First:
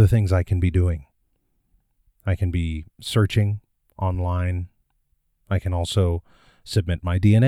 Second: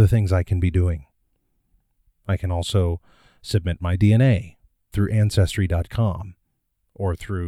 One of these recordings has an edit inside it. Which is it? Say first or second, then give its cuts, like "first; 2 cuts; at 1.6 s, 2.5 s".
second; 2 cuts; at 2.1 s, 4.9 s